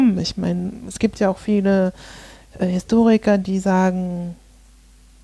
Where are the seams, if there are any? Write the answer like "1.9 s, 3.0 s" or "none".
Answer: none